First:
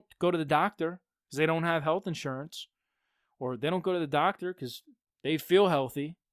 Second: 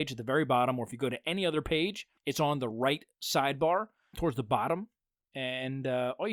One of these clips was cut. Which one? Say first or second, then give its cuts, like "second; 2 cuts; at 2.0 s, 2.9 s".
second; 2 cuts; at 2.2 s, 4.1 s